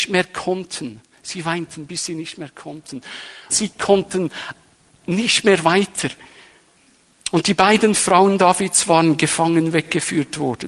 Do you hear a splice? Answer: yes; 1 cut; at 3.5 s

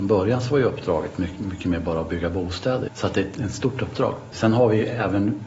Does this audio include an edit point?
yes; 2 cuts; at 2.9 s, 4.3 s

